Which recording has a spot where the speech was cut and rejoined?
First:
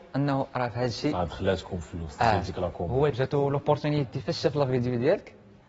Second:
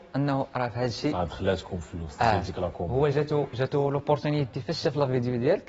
first; 1 cut; at 3.1 s

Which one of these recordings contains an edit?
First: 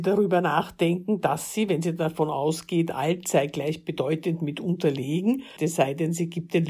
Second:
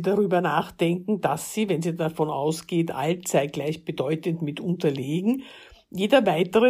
first; 1 cut; at 5.6 s

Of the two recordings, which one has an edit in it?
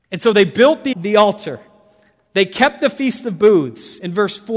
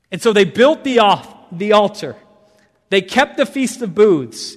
first; 1 cut; at 0.9 s

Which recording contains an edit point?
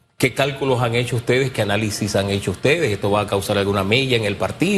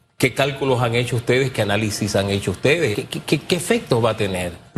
second; 1 cut; at 2.9 s

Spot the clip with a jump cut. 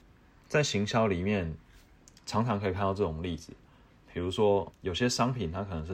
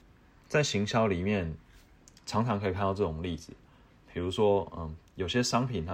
first; 1 cut; at 4.7 s

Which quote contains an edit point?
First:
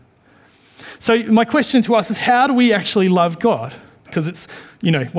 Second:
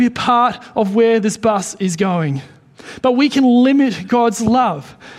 first; 1 cut; at 4.1 s

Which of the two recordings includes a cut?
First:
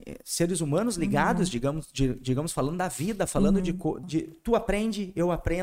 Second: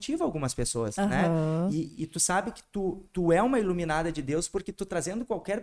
first; 1 cut; at 4.0 s

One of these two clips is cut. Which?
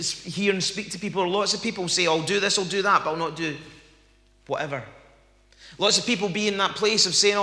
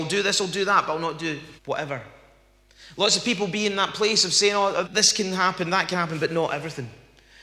second; 2 cuts; at 1.6 s, 4.8 s

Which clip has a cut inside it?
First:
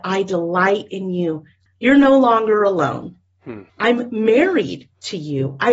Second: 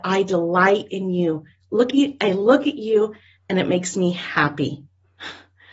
first; 2 cuts; at 1.7 s, 3.7 s

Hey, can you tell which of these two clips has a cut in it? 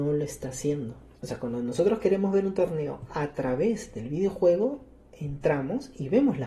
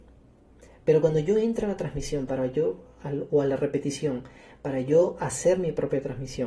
first; 1 cut; at 1.1 s

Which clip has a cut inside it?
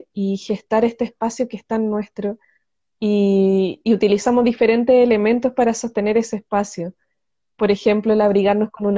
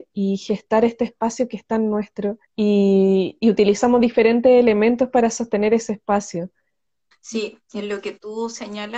second; 2 cuts; at 2.4 s, 7.1 s

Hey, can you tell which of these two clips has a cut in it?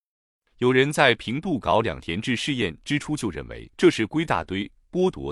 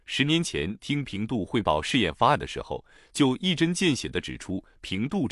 first; 1 cut; at 3.7 s

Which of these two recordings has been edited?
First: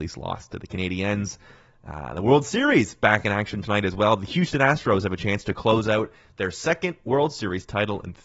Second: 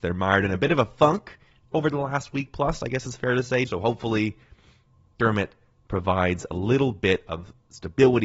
second; 1 cut; at 3.7 s

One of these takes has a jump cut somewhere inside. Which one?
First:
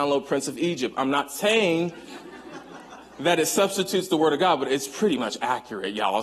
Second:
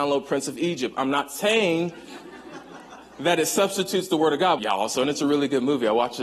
second; 1 cut; at 4.6 s

